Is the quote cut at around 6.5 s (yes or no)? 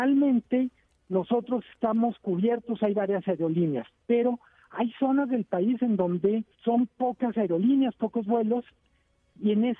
yes